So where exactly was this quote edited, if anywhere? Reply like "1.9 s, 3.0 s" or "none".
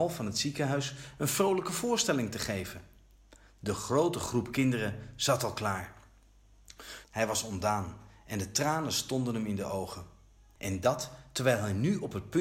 7.0 s, 10.6 s